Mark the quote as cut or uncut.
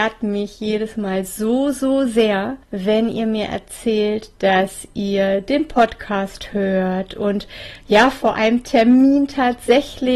cut